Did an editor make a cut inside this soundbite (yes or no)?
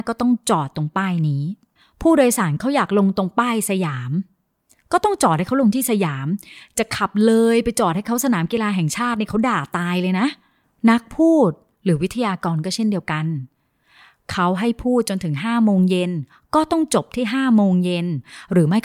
no